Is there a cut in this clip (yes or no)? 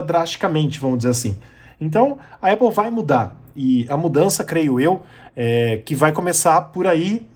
no